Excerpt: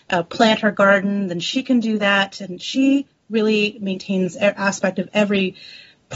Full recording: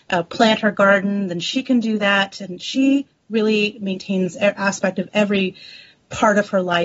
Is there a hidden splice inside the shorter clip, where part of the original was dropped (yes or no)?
no